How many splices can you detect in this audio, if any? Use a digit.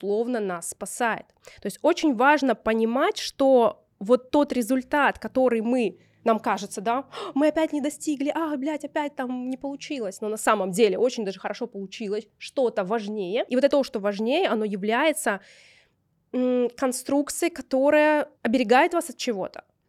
2